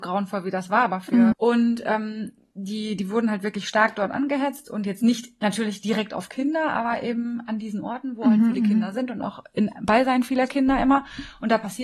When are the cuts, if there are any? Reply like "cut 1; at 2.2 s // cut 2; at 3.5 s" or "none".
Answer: cut 1; at 1.3 s